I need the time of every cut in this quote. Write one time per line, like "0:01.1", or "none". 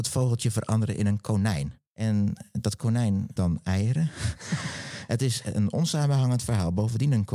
0:03.4
0:05.1